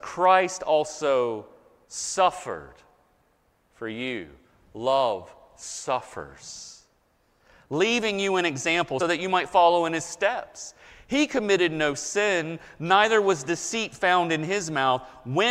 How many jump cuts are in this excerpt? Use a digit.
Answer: 1